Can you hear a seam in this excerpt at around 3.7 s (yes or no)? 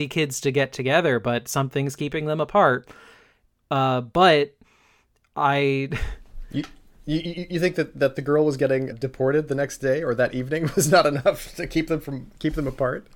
no